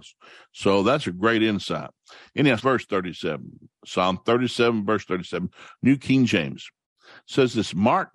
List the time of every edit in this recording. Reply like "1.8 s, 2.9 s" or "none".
2.6 s